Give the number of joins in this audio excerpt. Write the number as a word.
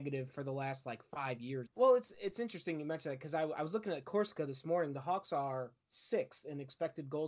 one